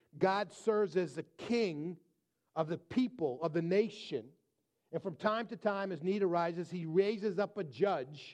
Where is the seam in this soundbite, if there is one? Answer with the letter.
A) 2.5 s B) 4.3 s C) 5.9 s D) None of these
D